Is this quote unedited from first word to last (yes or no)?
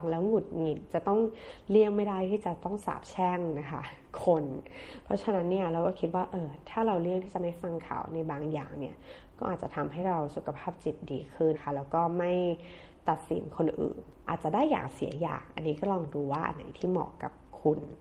no